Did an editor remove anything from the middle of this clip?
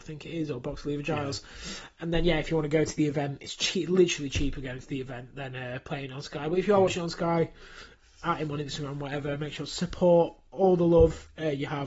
no; 0 cuts

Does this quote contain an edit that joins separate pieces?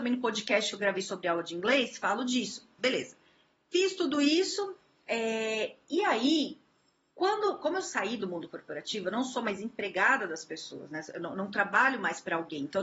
yes; 1 cut; at 2.8 s

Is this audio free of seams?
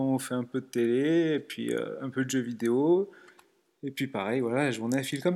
yes; 0 cuts

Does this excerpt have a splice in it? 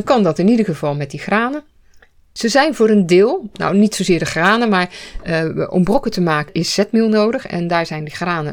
no; 0 cuts

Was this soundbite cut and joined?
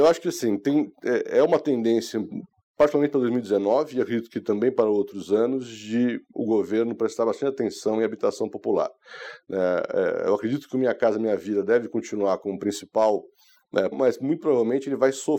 yes; 1 cut; at 13.9 s

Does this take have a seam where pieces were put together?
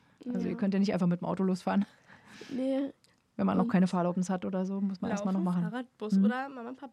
no; 0 cuts

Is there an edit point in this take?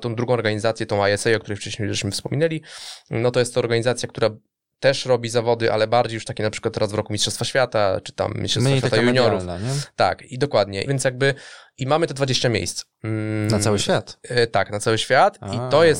yes; 2 cuts; at 10.9 s, 13.0 s

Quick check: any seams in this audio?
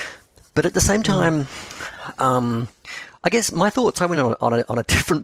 no; 0 cuts

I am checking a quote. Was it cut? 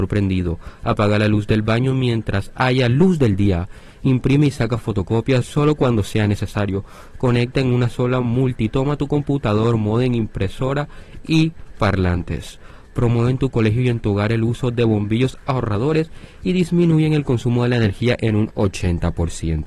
no; 0 cuts

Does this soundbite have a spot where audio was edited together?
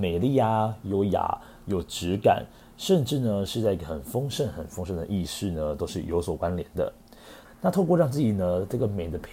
yes; 1 cut; at 7.5 s

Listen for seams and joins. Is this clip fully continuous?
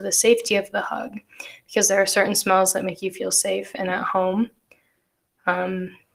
yes; 0 cuts

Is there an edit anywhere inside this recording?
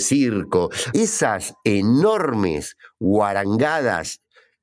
yes; 1 cut; at 0.9 s

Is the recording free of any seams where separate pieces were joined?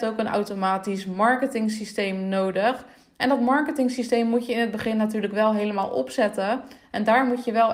yes; 0 cuts

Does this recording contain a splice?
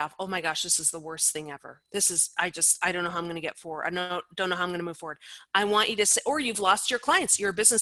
no; 0 cuts

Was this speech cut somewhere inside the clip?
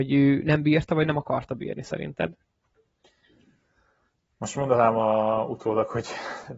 no; 0 cuts

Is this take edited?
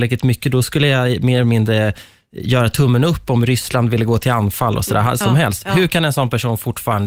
yes; 1 cut; at 5.2 s

